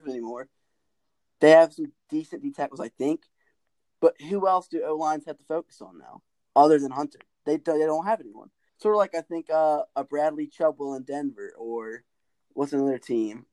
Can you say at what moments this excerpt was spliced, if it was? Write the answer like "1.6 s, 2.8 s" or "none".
8.7 s